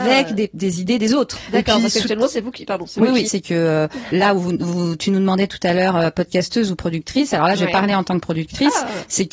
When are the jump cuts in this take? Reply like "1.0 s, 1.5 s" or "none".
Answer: 3.2 s